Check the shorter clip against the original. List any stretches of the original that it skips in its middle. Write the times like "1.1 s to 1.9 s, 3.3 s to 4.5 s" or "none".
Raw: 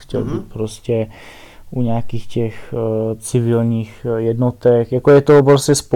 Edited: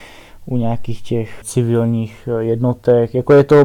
2.7 s to 3.2 s

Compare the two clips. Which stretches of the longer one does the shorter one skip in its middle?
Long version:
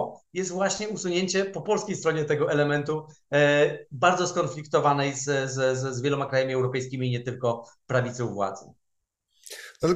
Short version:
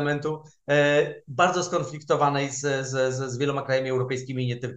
none

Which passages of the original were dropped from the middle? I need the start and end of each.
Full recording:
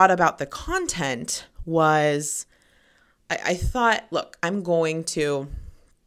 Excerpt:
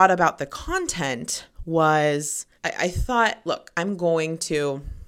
2.6 s to 3.2 s

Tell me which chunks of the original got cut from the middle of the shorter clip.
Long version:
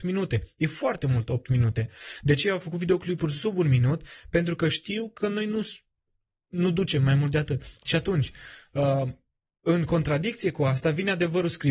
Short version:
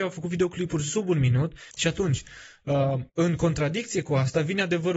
4.2 s to 7.8 s, 9.2 s to 9.6 s

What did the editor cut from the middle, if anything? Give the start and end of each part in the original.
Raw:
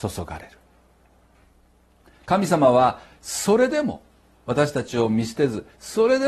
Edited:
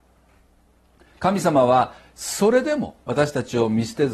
4.1 s to 4.4 s

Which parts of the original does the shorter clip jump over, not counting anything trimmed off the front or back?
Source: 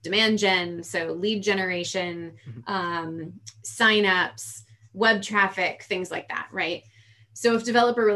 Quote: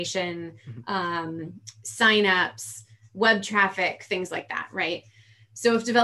none

